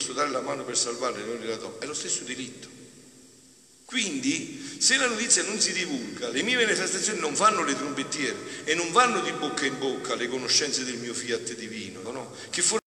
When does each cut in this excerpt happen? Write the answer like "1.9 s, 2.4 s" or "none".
3.9 s, 12.0 s